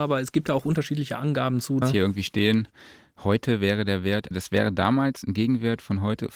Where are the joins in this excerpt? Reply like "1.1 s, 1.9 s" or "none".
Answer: 1.8 s, 4.3 s